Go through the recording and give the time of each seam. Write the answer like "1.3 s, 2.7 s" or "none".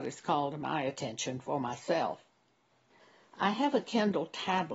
none